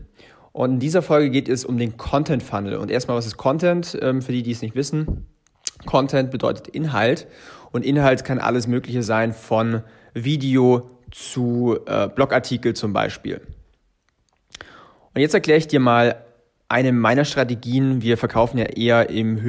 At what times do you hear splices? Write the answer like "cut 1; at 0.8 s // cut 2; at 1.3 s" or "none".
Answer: none